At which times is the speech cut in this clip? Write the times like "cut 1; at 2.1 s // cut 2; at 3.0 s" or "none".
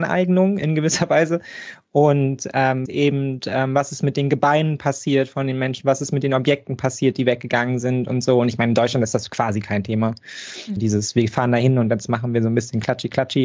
cut 1; at 2.9 s // cut 2; at 10.8 s